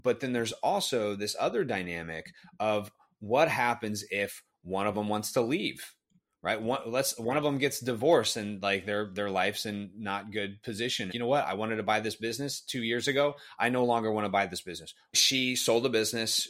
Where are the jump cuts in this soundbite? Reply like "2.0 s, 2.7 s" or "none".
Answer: 11.1 s, 15.1 s